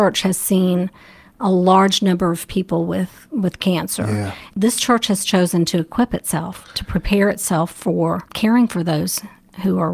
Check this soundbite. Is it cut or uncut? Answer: cut